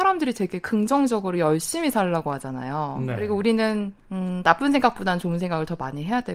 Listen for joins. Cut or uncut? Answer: cut